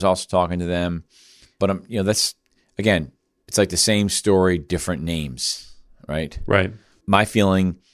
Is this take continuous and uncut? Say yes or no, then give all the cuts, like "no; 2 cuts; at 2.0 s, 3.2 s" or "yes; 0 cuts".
yes; 0 cuts